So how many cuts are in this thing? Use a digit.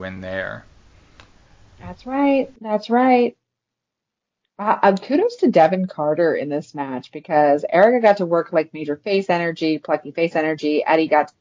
0